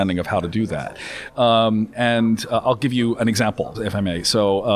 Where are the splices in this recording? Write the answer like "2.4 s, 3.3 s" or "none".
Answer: 1.3 s, 3.7 s